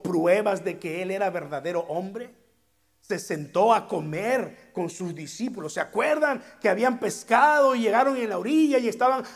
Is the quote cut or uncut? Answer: uncut